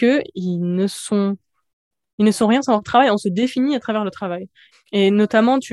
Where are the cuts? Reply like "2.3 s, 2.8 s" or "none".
4.7 s